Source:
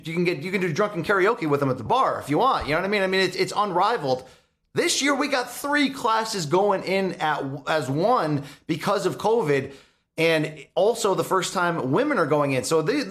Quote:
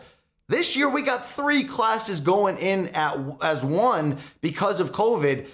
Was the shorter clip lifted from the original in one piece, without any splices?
yes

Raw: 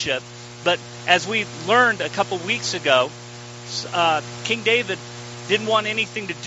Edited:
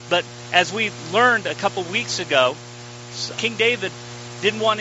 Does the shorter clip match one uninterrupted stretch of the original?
no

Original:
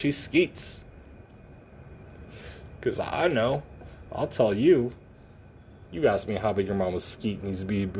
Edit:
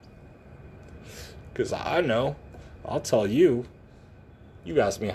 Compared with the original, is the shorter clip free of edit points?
yes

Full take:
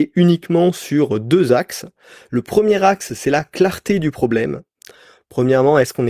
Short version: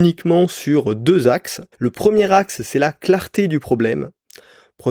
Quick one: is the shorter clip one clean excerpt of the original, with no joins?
no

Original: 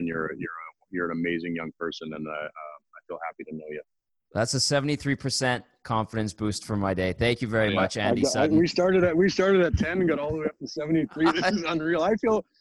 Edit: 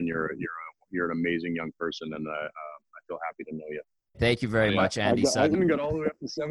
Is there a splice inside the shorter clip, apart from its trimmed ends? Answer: yes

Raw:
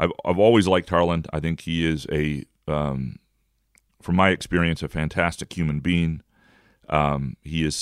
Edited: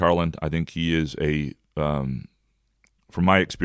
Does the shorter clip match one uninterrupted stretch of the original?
yes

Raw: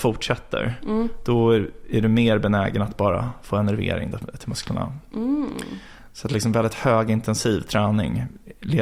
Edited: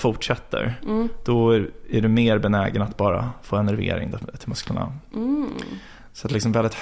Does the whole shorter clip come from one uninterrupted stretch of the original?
yes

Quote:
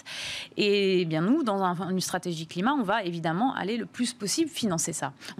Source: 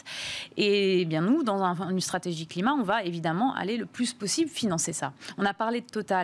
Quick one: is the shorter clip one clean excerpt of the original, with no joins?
yes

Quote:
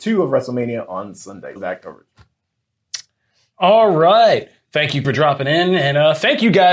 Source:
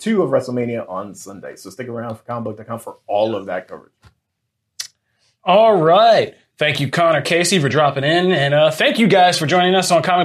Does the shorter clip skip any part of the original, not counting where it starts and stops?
yes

